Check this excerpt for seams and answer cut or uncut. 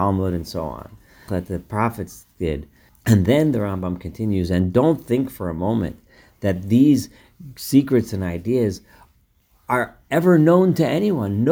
cut